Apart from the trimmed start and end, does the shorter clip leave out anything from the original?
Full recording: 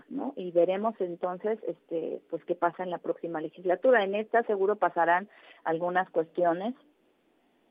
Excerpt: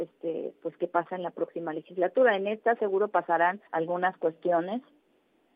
yes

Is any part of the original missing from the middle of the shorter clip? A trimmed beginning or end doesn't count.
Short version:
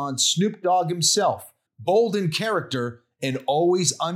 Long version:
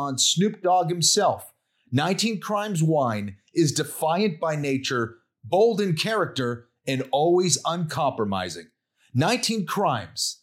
yes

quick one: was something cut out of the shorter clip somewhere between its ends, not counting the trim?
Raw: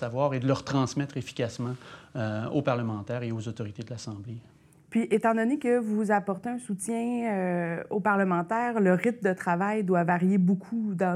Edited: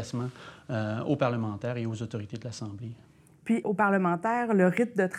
yes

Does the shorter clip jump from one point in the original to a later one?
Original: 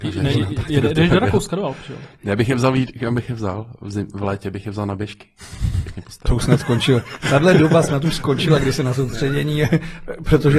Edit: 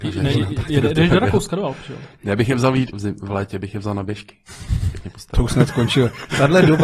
yes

